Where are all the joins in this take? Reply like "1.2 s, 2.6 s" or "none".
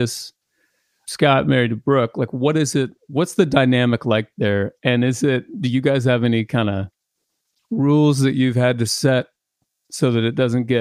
none